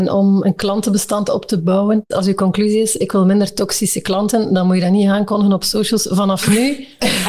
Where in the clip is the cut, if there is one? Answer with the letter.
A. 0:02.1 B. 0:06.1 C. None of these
A